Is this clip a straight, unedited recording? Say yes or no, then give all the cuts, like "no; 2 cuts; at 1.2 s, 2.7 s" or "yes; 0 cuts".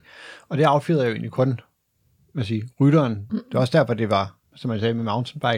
no; 2 cuts; at 3.3 s, 4.4 s